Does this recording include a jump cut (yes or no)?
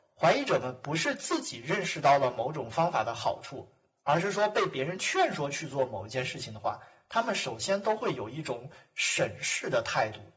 no